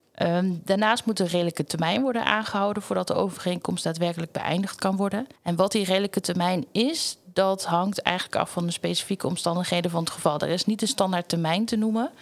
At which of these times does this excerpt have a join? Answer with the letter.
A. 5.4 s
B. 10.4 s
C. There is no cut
A